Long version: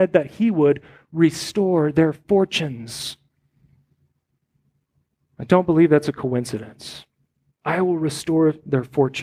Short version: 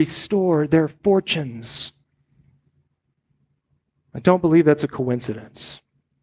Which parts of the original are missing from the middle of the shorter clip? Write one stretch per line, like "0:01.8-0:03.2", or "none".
none